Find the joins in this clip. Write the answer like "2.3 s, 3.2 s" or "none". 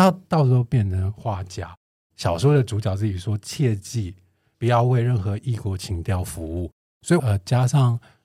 2.0 s, 4.5 s, 7.2 s